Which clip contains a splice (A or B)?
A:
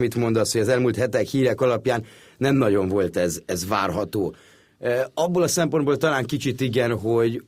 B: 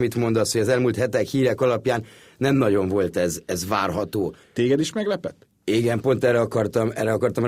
B